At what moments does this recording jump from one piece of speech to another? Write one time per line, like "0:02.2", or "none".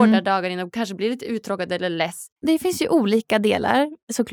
0:02.3